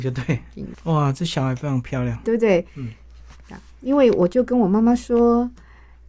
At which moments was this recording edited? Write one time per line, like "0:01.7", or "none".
0:02.2